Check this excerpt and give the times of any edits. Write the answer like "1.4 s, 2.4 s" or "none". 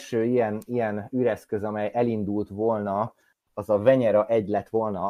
none